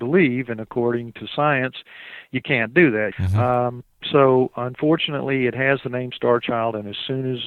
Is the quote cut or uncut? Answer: cut